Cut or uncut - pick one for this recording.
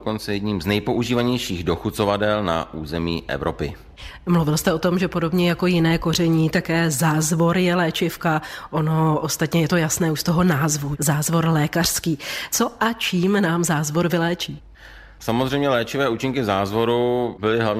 uncut